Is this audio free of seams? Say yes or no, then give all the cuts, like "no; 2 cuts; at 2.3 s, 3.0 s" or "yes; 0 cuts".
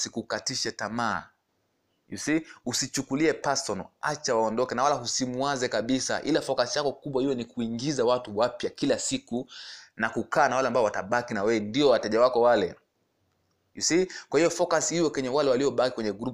yes; 0 cuts